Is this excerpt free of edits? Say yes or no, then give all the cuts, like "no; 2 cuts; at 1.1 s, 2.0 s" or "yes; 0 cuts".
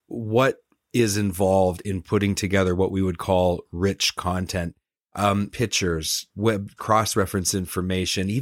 no; 2 cuts; at 5.5 s, 6.8 s